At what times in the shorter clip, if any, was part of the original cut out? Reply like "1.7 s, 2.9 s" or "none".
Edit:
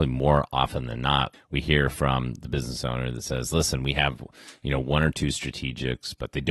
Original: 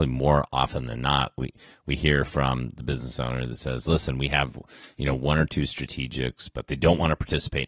1.3 s